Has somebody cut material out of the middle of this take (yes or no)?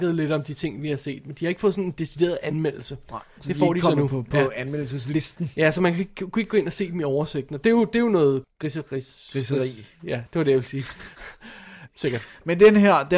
yes